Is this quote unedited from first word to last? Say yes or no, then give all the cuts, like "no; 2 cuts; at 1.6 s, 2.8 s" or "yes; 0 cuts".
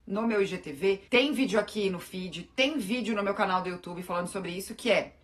no; 1 cut; at 1.1 s